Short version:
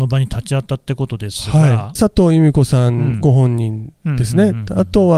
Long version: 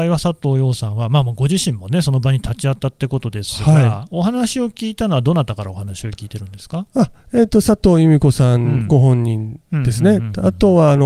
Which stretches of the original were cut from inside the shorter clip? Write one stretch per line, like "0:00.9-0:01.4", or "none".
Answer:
0:04.1-0:07.6